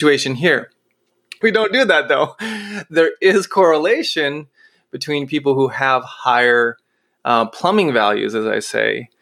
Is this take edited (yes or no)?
yes